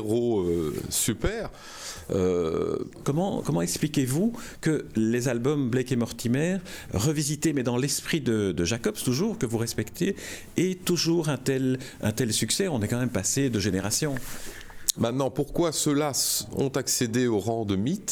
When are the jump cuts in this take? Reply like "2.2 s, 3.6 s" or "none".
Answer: 3.0 s, 14.9 s